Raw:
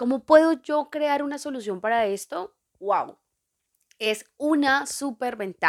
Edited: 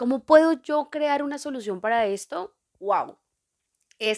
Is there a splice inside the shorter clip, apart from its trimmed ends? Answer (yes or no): no